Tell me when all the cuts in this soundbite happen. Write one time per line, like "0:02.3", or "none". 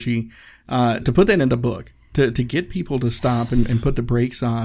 0:01.0